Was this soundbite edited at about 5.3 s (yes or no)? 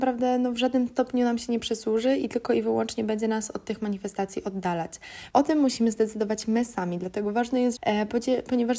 yes